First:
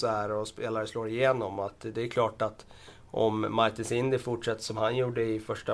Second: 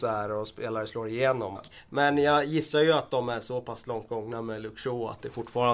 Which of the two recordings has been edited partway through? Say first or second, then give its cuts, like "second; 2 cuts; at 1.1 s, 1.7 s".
second; 1 cut; at 1.6 s